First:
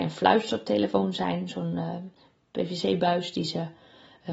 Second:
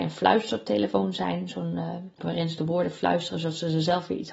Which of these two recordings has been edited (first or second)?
second